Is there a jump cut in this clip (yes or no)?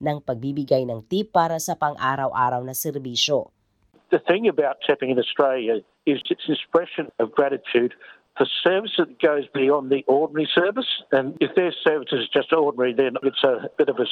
no